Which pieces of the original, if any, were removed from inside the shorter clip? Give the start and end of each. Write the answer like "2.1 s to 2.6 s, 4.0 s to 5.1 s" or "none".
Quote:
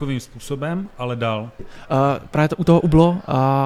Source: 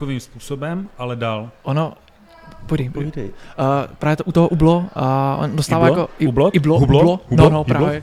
1.6 s to 3.3 s